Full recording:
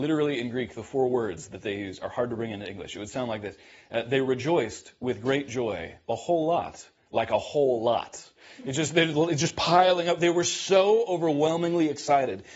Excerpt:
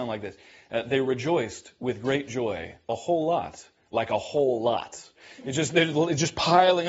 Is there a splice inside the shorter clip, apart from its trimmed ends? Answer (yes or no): no